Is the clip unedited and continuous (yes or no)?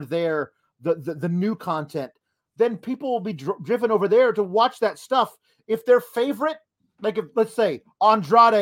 yes